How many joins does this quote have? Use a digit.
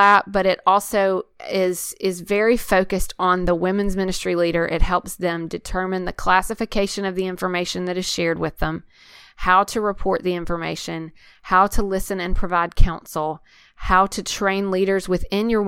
0